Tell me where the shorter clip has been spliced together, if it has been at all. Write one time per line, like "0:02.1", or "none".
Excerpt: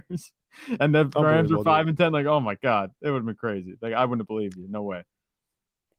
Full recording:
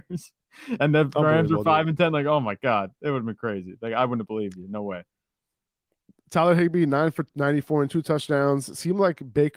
none